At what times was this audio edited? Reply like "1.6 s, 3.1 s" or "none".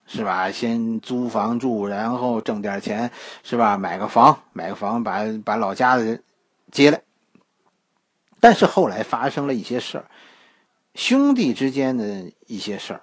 none